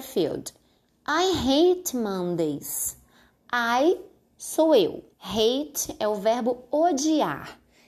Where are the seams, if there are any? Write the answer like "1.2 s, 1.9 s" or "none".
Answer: 5.1 s